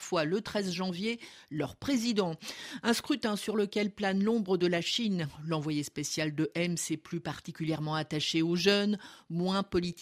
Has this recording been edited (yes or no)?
no